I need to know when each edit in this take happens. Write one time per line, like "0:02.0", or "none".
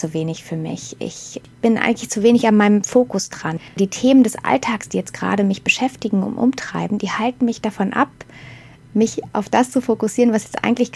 none